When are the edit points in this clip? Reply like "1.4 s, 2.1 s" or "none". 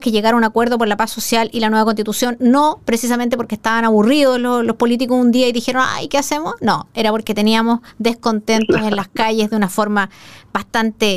none